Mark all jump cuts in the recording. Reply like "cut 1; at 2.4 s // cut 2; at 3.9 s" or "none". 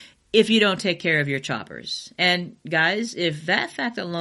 none